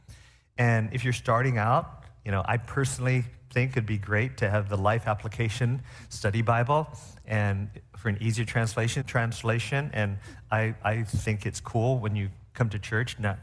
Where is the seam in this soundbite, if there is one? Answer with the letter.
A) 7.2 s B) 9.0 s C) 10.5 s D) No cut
B